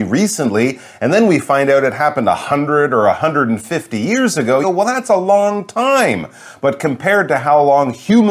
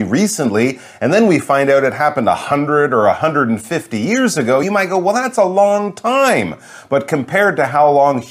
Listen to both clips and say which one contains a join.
first; 1 cut; at 4.6 s

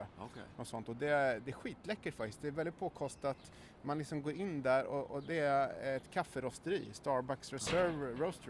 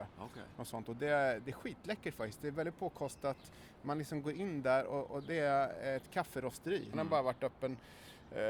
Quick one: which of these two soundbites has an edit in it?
second; 1 cut; at 6.9 s

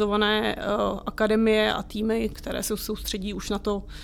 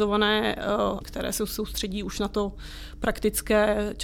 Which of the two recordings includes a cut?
second; 1 cut; at 1.0 s

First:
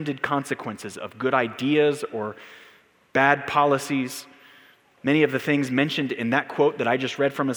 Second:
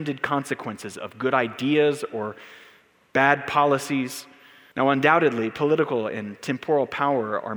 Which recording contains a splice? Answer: second; 1 cut; at 4.7 s

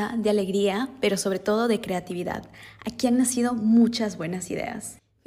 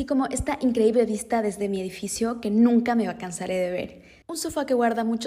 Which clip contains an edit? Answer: second; 1 cut; at 4.2 s

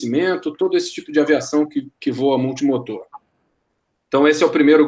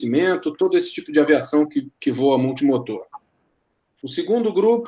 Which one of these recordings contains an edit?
second; 1 cut; at 4.0 s

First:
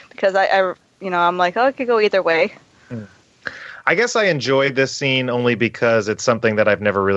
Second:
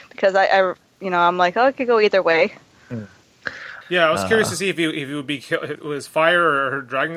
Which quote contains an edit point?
second; 2 cuts; at 3.8 s, 5.7 s

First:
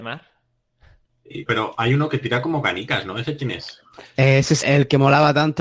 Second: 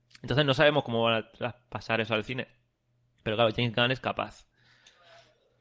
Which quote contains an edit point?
first; 2 cuts; at 1.5 s, 4.6 s

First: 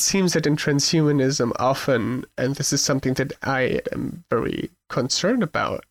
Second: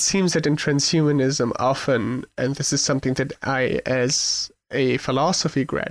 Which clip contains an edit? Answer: first; 1 cut; at 3.8 s

